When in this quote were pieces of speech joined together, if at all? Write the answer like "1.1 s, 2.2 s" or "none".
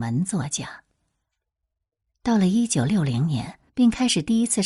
3.7 s